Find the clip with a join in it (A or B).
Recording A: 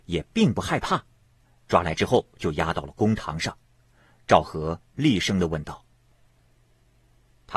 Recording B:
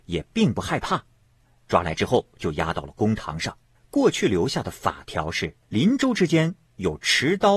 B